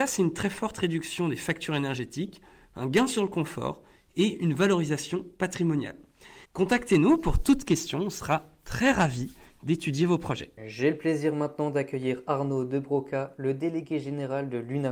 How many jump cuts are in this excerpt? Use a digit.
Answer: 2